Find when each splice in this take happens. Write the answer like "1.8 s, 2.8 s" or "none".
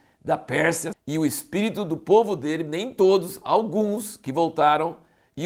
0.9 s